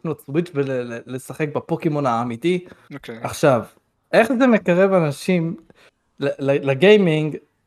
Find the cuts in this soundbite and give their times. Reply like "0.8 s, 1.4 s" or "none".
2.9 s